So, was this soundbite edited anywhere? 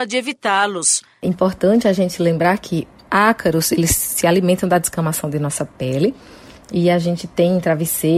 no; 0 cuts

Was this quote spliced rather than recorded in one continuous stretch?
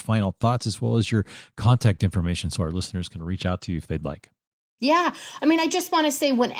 no; 0 cuts

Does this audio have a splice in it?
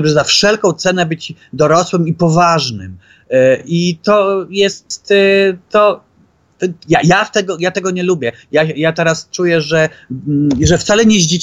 no; 0 cuts

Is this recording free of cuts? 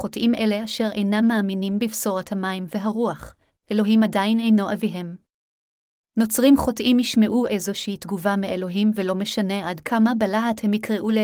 yes; 0 cuts

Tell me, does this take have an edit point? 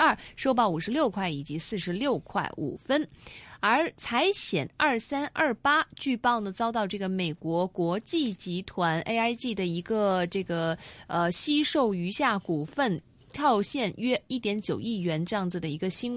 no; 0 cuts

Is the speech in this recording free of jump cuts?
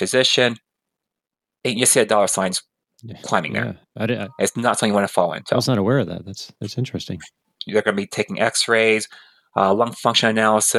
no; 1 cut; at 7.6 s

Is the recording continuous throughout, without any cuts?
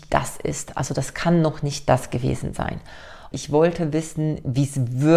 no; 1 cut; at 3.3 s

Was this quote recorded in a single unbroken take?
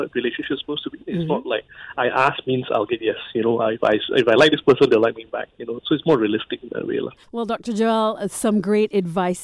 yes; 0 cuts

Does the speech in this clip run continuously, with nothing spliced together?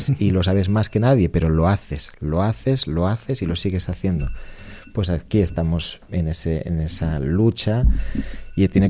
yes; 0 cuts

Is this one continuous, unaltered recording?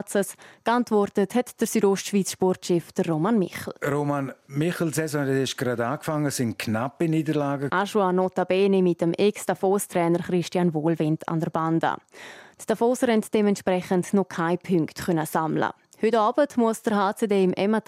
no; 2 cuts; at 3.8 s, 7.7 s

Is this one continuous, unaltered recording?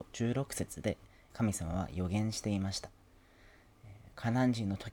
no; 1 cut; at 1.3 s

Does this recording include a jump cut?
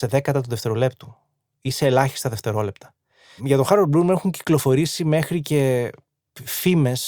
yes; 1 cut; at 3.4 s

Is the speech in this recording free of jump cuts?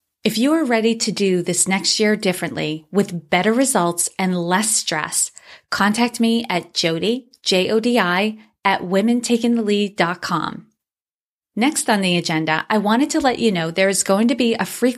yes; 0 cuts

